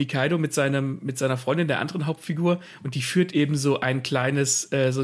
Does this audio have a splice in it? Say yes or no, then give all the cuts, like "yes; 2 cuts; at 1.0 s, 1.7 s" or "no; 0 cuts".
no; 0 cuts